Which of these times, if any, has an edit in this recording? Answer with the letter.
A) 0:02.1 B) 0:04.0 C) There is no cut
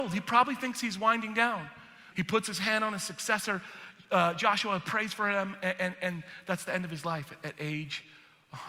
A